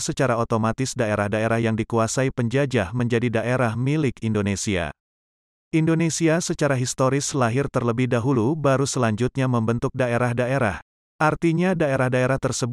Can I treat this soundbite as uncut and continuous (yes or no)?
no